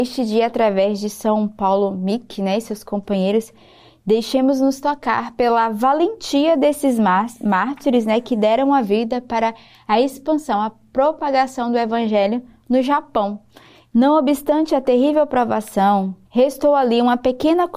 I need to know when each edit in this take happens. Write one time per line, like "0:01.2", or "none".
0:13.9
0:16.2